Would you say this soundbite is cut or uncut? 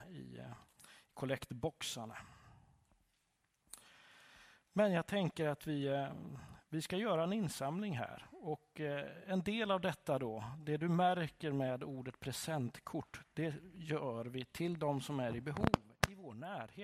uncut